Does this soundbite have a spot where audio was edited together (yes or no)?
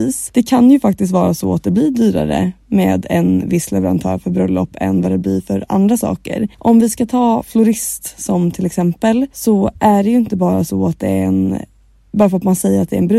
yes